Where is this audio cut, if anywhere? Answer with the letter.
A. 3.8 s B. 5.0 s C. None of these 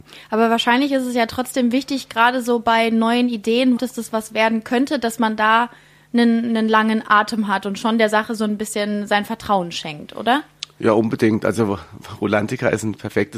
A